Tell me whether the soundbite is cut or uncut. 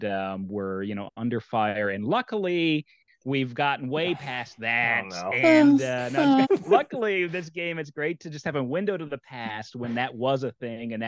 cut